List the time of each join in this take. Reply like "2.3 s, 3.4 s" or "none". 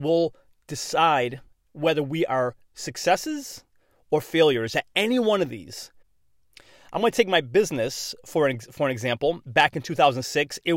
none